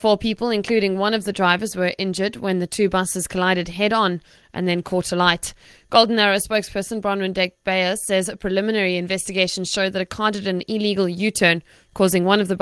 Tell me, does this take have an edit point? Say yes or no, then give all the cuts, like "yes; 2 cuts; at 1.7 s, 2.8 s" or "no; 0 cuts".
no; 0 cuts